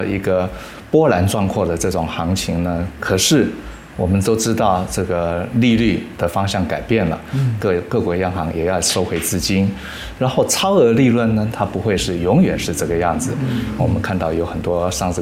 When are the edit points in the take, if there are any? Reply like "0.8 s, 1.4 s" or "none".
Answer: 7.6 s, 11.5 s, 13.8 s